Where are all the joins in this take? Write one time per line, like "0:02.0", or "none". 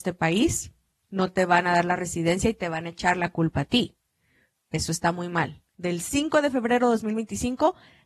0:04.5
0:05.7